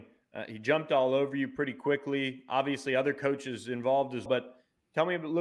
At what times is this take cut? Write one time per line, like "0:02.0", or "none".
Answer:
0:04.3